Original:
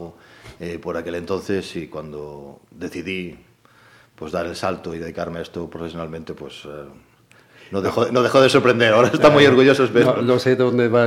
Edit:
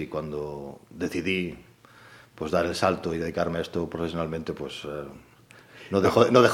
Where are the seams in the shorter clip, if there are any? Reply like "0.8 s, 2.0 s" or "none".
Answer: none